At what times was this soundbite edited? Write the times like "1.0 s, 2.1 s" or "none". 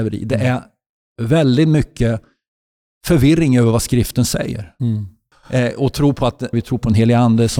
5.3 s, 6.5 s

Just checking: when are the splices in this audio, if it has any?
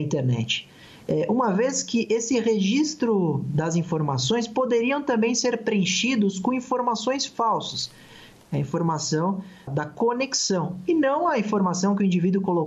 8.4 s, 9.7 s

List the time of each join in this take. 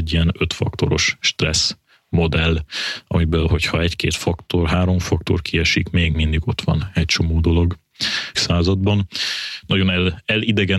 8.3 s

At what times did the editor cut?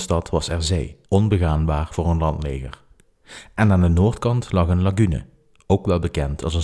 1.1 s

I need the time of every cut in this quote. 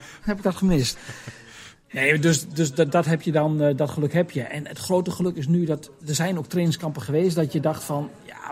none

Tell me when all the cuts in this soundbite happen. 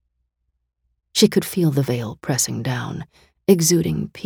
1.1 s

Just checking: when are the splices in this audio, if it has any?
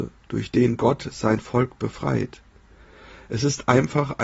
none

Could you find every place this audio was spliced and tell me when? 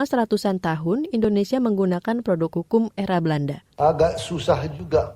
3.7 s

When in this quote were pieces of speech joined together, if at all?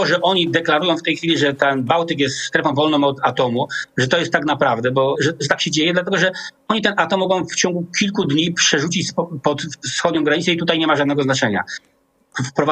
5.1 s

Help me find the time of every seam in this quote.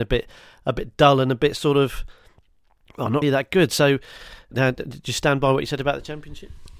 3.2 s, 4.5 s

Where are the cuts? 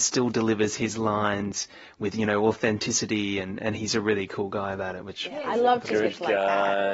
none

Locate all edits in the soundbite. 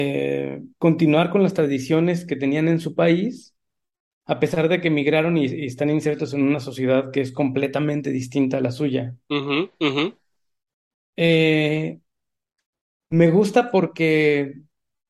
none

